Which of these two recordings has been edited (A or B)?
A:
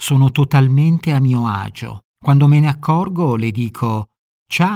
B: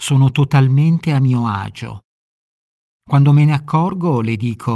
A